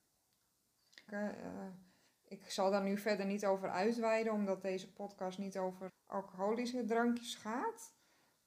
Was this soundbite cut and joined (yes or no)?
yes